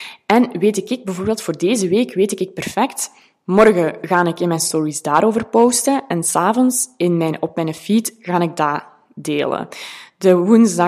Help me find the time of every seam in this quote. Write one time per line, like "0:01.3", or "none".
none